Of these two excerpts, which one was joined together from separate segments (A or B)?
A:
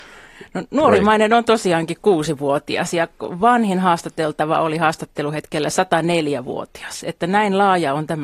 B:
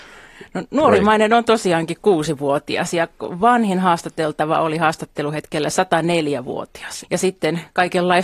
B